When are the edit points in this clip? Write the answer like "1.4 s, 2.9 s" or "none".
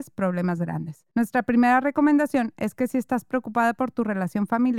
1.1 s